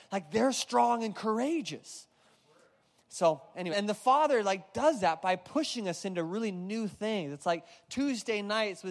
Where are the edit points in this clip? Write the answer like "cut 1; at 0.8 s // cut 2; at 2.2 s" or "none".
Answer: cut 1; at 3.7 s